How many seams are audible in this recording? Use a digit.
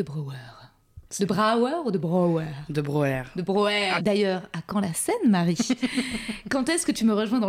2